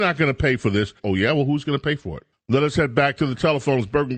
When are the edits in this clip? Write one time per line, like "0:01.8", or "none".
0:01.0
0:02.3